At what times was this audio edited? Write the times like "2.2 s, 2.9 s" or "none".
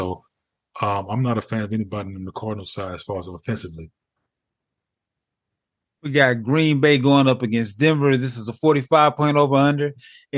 none